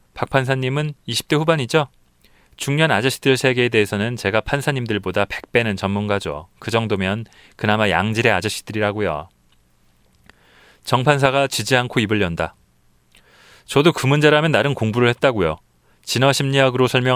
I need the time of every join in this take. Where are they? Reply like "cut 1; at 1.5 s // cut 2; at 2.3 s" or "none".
none